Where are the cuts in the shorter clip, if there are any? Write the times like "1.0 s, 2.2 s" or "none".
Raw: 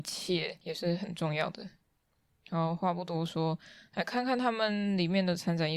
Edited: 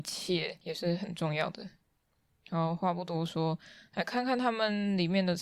none